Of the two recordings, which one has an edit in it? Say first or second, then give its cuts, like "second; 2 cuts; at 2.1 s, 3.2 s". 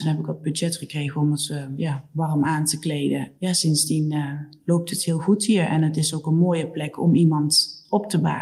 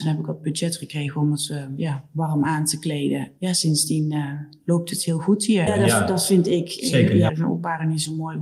second; 2 cuts; at 5.7 s, 7.3 s